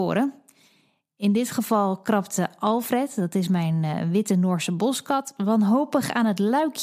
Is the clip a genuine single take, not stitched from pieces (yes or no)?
yes